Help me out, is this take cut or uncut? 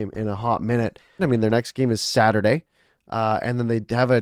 cut